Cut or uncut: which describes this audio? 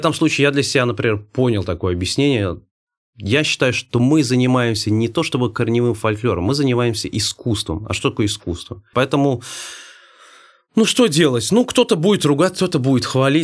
cut